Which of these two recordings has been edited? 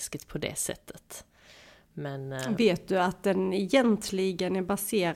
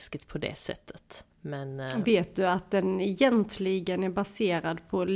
second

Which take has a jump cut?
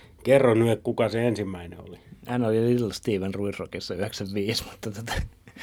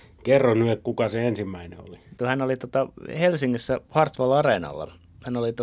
second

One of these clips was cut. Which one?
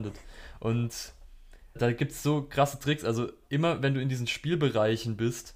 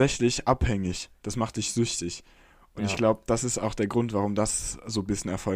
first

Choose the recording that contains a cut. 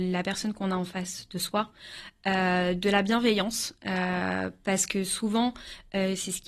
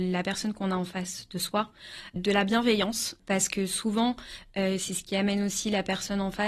second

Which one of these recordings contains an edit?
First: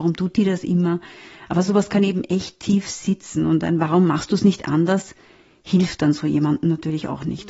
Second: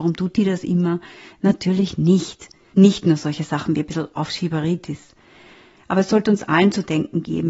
second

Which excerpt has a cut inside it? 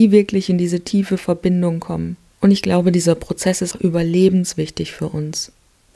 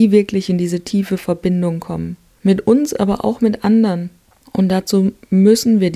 first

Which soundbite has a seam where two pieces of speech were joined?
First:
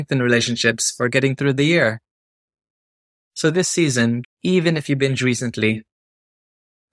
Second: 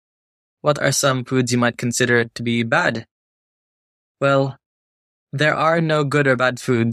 first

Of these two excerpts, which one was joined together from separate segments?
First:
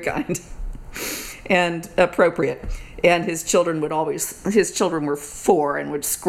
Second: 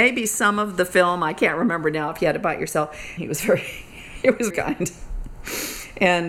second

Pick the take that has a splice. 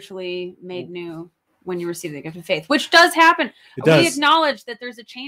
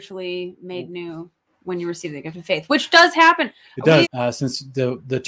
second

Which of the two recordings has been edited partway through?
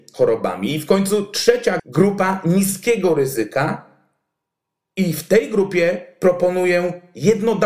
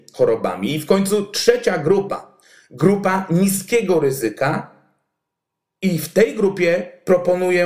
first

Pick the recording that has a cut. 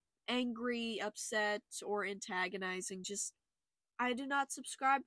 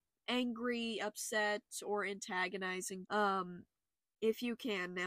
second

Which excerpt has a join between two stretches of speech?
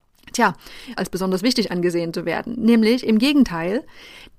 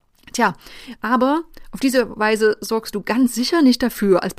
first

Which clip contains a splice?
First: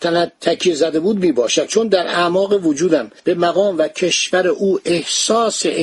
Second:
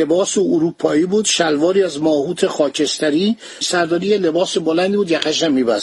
second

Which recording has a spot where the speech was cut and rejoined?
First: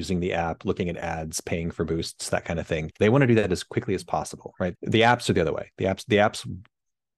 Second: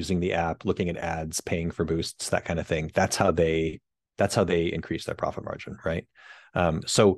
first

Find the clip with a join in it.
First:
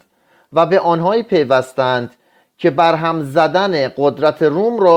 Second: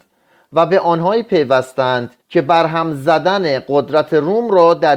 second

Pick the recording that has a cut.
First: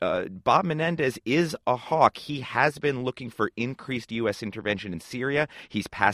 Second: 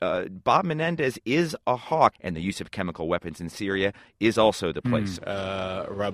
second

